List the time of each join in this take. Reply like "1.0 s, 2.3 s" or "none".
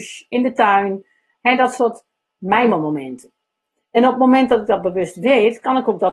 none